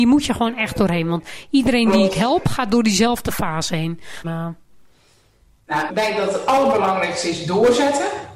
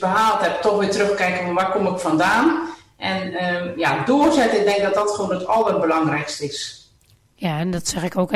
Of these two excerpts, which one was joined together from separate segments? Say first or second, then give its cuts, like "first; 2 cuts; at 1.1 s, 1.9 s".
first; 2 cuts; at 4.2 s, 5.9 s